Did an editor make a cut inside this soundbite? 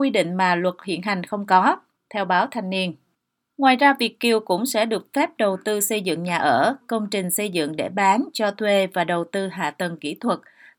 no; 0 cuts

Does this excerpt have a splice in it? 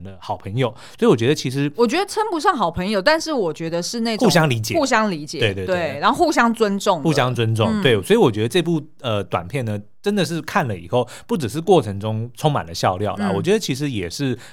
no; 0 cuts

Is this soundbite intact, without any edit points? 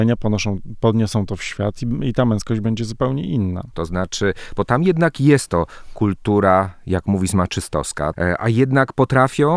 no; 2 cuts; at 3.7 s, 8.1 s

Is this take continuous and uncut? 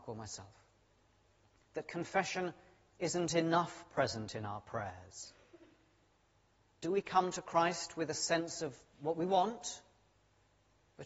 no; 1 cut; at 1.6 s

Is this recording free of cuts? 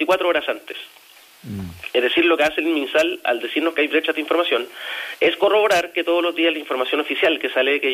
yes; 0 cuts

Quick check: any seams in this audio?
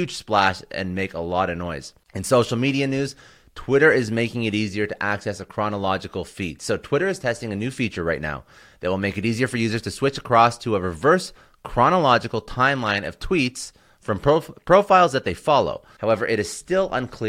yes; 1 cut; at 16.0 s

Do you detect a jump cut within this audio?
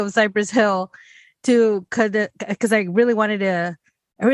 no; 0 cuts

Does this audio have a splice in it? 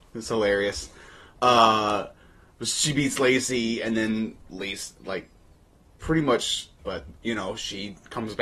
yes; 1 cut; at 6.8 s

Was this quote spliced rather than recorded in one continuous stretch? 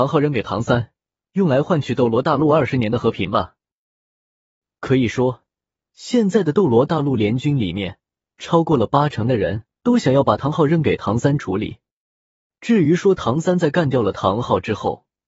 yes; 1 cut; at 9.7 s

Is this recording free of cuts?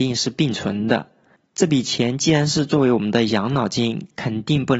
yes; 0 cuts

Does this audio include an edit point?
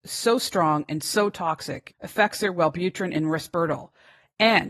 yes; 1 cut; at 1.9 s

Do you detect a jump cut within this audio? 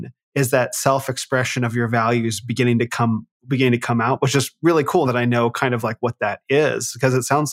yes; 1 cut; at 5.0 s

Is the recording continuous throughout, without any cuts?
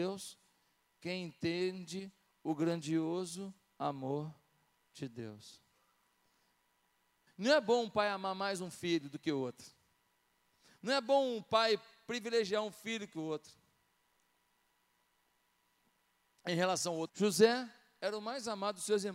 no; 2 cuts; at 7.3 s, 17.1 s

